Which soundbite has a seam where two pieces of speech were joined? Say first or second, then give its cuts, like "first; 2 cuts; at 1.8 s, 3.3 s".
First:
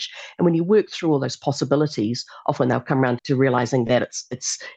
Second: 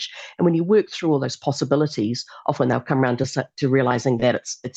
first; 1 cut; at 3.2 s